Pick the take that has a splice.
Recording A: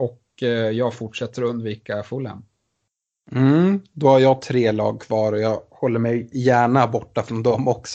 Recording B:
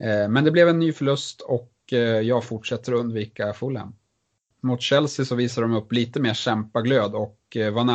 B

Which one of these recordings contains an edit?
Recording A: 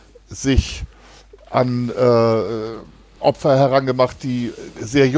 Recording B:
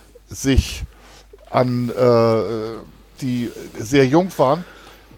B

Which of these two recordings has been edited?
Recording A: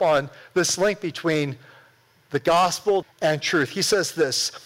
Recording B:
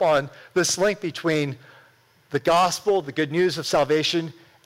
A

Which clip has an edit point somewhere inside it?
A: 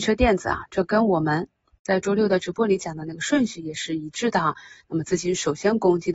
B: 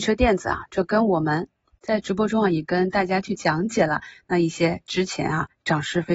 B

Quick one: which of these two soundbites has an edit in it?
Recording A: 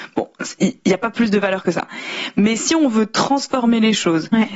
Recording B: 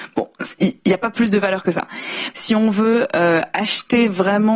B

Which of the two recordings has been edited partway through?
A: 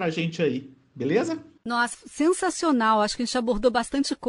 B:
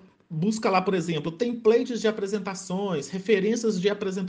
A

